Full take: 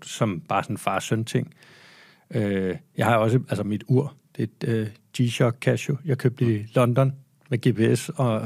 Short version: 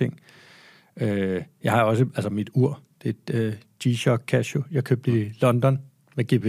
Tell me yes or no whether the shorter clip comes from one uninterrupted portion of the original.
yes